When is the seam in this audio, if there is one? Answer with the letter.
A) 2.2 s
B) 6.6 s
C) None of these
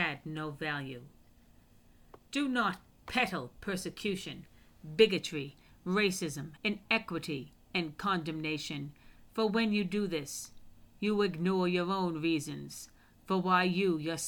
B